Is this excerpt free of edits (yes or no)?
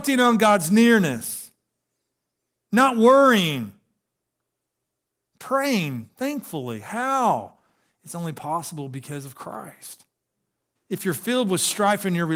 no